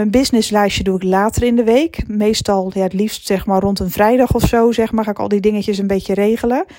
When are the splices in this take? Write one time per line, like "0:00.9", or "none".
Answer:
none

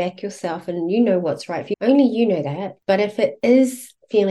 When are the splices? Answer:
0:01.7

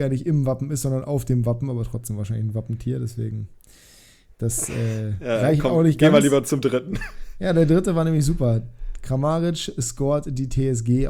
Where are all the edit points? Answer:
none

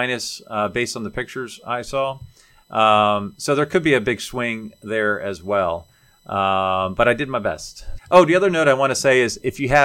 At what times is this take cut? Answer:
0:08.0

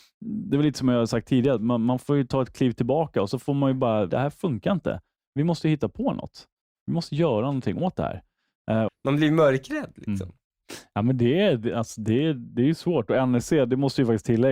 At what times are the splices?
0:04.1
0:08.9

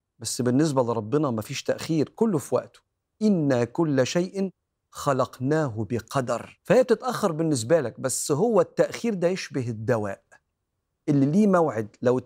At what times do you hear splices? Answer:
0:06.6

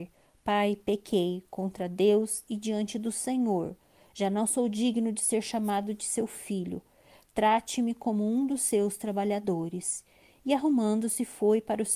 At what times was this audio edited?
none

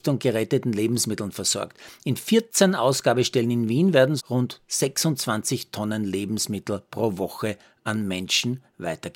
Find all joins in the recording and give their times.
0:04.2

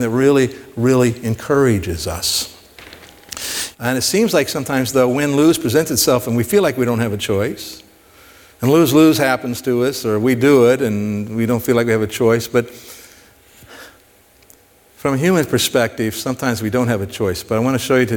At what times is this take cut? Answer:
0:03.7

